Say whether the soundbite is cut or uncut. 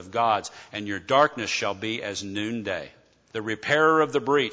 cut